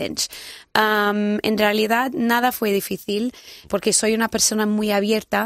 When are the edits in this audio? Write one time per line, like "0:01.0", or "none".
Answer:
0:03.7